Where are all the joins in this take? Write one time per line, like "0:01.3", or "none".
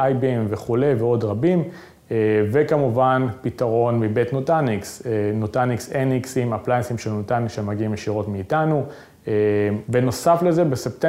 0:09.8